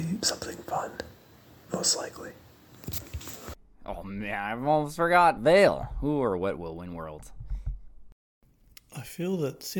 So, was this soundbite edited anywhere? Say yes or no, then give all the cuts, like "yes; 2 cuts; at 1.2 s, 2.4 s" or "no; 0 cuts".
no; 0 cuts